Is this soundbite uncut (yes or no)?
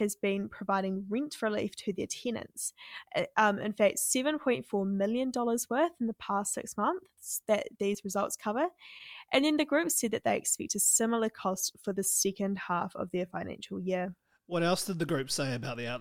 yes